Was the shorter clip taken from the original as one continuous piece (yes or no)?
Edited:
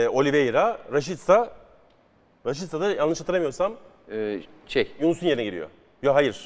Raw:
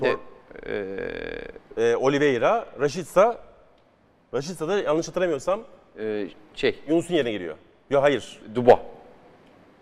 yes